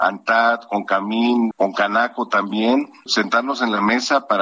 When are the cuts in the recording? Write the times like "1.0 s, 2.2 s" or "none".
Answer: 1.5 s, 3.1 s